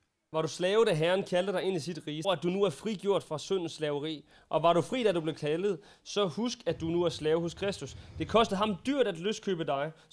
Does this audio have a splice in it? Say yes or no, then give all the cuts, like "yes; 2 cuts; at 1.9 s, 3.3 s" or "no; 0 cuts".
yes; 1 cut; at 2.2 s